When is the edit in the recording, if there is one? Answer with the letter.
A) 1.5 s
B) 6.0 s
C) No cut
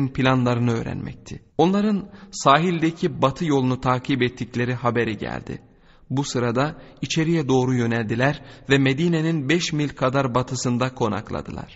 A